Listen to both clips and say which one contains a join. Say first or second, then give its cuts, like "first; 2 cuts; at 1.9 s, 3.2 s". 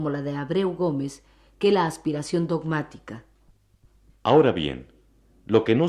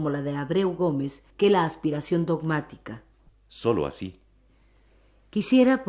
second; 2 cuts; at 1.3 s, 3.3 s